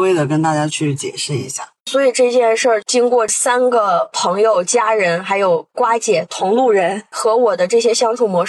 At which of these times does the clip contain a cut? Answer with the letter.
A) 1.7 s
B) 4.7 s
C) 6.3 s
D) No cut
D